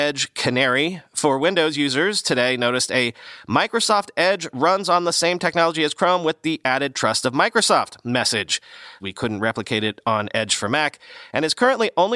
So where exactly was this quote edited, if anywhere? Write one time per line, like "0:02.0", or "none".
0:09.0